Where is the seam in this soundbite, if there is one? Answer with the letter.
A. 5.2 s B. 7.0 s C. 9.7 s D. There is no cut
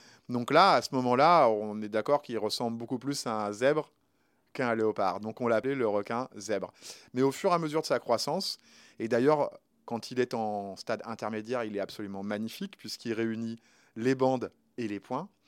D